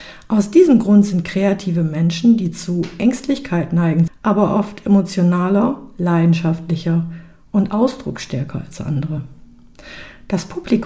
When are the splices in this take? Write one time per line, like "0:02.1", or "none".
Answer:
0:04.1